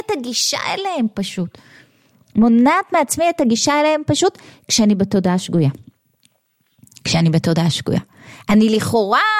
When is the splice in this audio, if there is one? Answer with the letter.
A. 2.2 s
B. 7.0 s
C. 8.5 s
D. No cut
D